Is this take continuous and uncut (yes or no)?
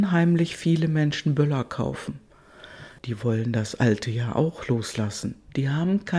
no